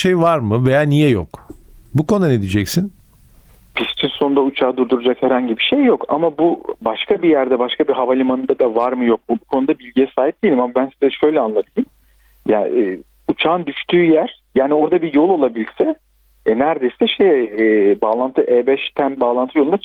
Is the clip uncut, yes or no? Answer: yes